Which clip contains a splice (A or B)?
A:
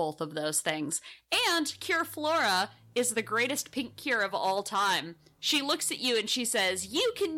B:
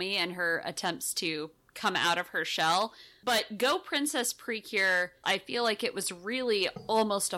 B